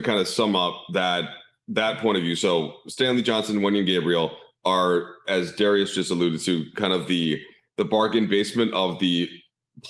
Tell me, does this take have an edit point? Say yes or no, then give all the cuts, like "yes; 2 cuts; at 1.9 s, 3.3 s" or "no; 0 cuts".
no; 0 cuts